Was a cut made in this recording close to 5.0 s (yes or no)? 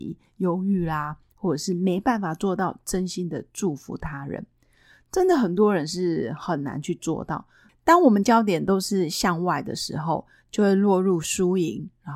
no